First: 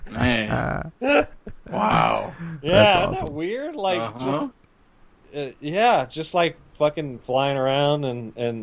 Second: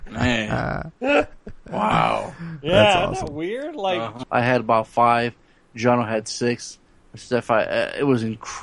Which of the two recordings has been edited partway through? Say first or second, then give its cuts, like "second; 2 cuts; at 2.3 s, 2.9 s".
second; 1 cut; at 4.2 s